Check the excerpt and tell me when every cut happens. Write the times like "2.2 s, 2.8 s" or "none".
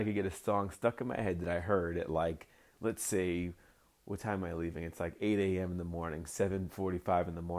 none